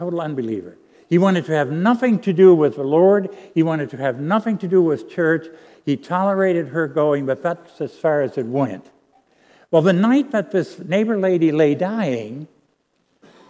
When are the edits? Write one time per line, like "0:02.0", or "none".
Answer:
none

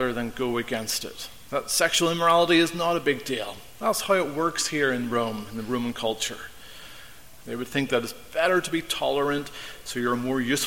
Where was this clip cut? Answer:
0:01.5
0:07.4

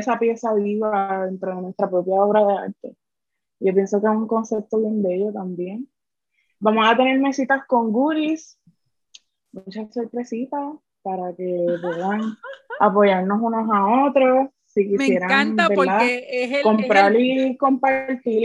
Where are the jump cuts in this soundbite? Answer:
none

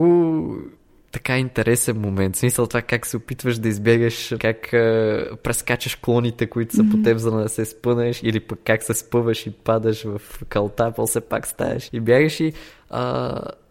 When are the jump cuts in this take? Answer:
0:04.4
0:11.9

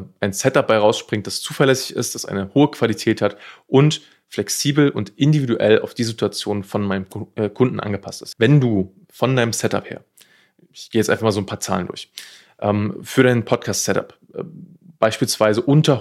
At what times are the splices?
0:08.3

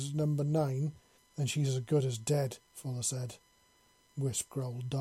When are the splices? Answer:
0:01.2
0:02.6

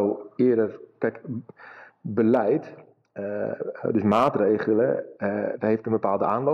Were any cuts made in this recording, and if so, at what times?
none

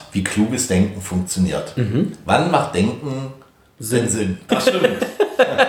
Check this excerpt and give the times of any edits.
0:04.5

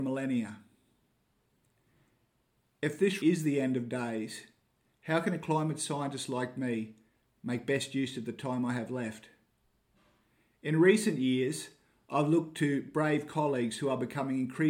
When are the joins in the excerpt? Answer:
0:03.2

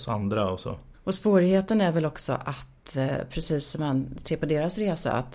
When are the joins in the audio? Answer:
0:00.9

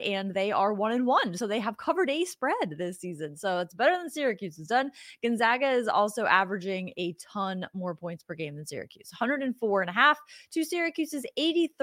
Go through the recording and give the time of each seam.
none

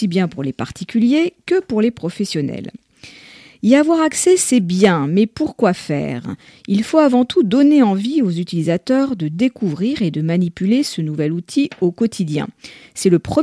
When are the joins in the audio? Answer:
none

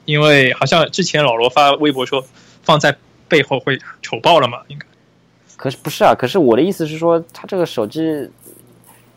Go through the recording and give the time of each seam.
none

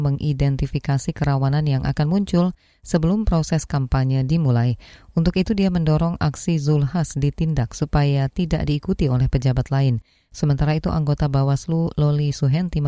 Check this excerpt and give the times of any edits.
none

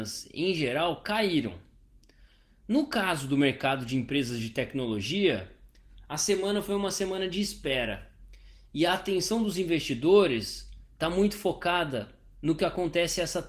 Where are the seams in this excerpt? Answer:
none

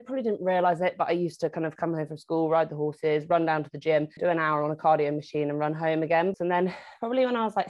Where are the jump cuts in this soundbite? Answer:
0:04.2
0:06.3

